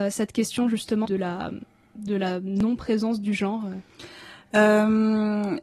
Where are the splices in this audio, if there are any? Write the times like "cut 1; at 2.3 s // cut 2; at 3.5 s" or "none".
cut 1; at 1.0 s